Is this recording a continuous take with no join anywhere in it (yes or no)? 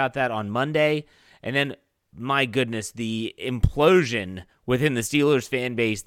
yes